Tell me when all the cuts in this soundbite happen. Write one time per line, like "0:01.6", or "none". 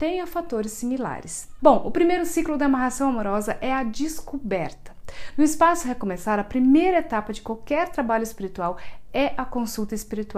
0:01.6

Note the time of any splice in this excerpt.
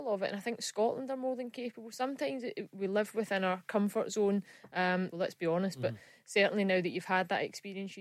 0:05.1

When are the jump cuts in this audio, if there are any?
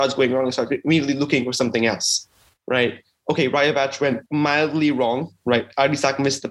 0:04.3

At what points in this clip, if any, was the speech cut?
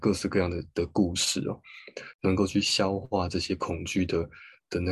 0:02.1

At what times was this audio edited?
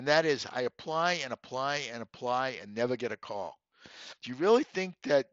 0:04.2

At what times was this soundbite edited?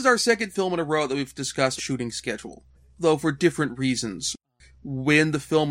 0:01.8

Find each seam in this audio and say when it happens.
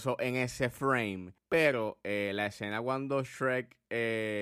0:01.4

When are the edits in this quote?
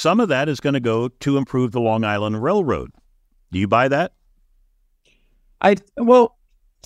none

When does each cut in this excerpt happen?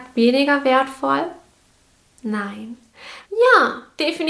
0:03.2

